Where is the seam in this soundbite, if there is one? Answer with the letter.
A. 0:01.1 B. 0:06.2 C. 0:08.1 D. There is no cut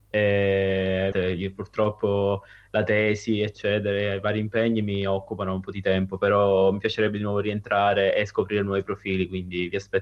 A